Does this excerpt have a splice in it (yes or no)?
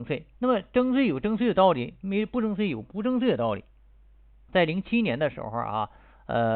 yes